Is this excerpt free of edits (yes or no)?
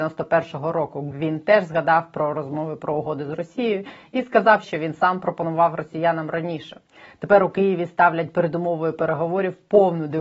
no